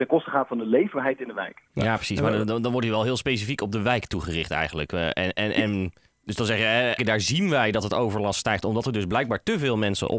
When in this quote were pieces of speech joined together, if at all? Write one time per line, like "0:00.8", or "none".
0:07.0